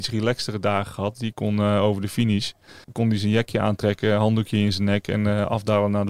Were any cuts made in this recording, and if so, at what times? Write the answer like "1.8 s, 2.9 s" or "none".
2.8 s

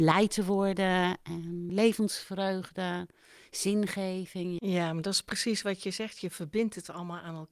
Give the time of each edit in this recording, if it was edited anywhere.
1.7 s, 4.6 s

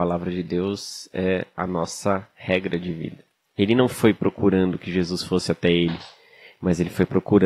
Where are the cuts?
3.5 s

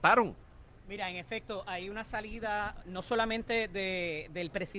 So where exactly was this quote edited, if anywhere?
2.8 s

